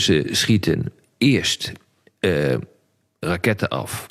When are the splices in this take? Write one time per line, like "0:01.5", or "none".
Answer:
none